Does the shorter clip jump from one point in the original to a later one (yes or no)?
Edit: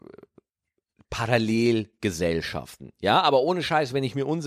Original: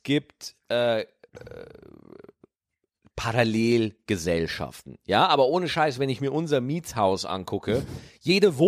no